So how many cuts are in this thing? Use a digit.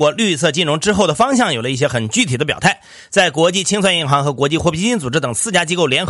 0